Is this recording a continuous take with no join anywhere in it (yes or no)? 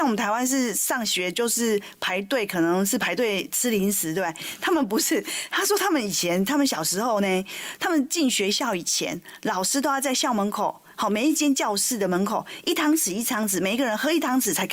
yes